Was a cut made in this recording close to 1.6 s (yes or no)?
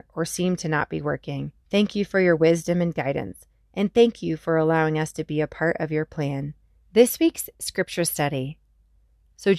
yes